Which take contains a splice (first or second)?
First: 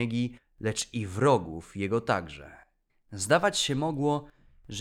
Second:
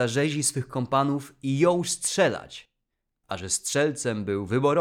first